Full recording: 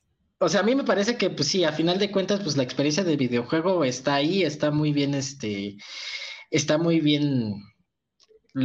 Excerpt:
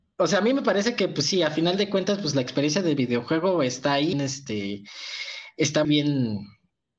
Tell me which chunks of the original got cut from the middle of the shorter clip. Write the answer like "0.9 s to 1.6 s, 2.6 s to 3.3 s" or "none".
4.3 s to 5.1 s, 6.8 s to 7.0 s